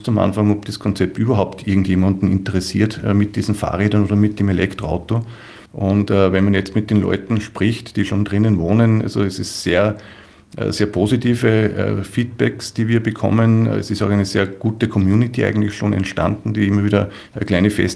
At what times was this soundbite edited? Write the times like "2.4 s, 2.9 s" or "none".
5.7 s